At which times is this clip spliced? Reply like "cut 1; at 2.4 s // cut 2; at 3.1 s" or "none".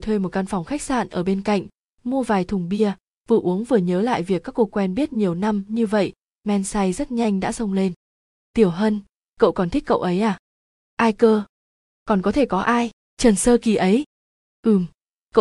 none

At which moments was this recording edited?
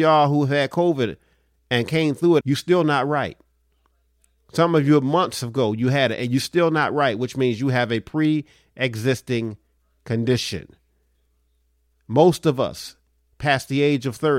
cut 1; at 2.4 s

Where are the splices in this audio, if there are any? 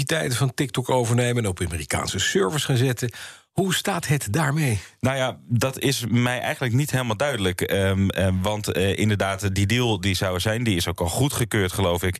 none

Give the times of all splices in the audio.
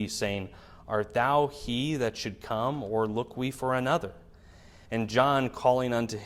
cut 1; at 4.9 s

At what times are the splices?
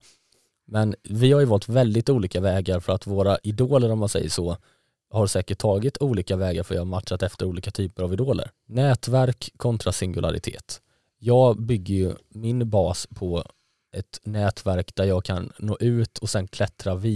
cut 1; at 8.5 s

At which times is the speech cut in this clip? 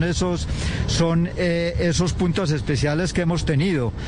none

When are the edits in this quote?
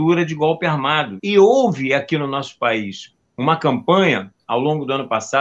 cut 1; at 1.2 s

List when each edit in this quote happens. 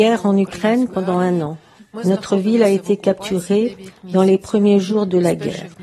none

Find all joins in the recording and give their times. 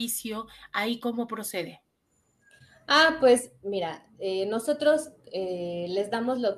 none

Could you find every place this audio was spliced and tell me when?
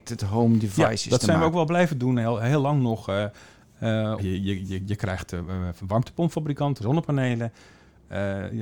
cut 1; at 4.2 s // cut 2; at 6.8 s

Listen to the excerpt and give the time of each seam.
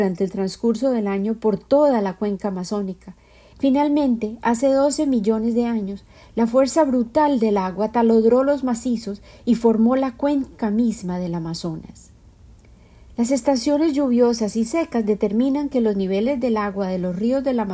cut 1; at 3.5 s

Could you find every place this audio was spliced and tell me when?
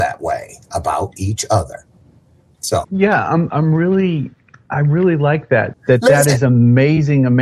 cut 1; at 2.8 s // cut 2; at 5.7 s

